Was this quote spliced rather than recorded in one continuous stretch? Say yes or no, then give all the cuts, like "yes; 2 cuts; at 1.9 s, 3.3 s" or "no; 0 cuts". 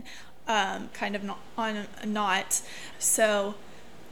yes; 2 cuts; at 0.9 s, 2.9 s